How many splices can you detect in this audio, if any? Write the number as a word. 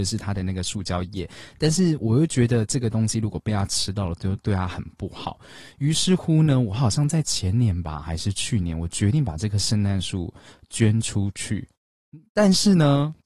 zero